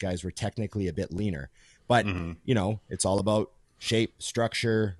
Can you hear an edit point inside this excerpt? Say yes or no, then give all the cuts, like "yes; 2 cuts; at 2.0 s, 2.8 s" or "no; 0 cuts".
no; 0 cuts